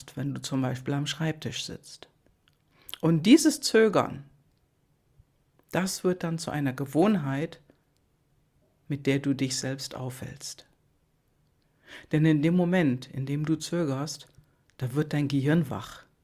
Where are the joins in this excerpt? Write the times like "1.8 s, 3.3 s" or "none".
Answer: none

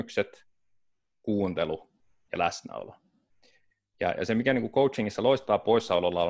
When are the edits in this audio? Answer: none

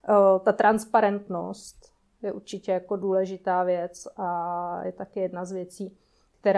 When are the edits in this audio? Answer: none

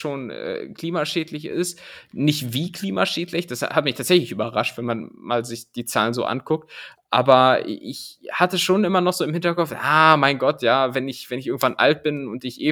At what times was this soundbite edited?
none

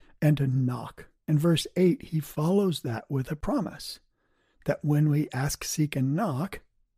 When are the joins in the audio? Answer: none

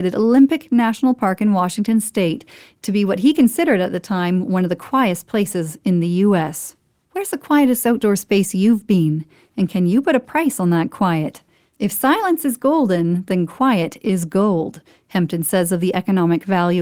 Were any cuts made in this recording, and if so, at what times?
none

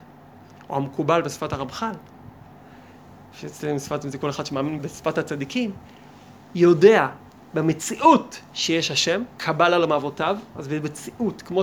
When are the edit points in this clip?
4.8 s, 9.3 s

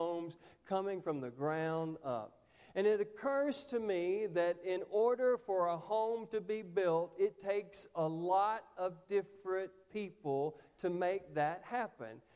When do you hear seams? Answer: none

